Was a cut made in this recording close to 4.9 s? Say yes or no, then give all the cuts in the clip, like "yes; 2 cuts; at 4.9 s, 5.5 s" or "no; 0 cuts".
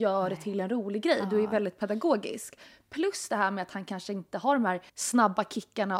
yes; 1 cut; at 4.9 s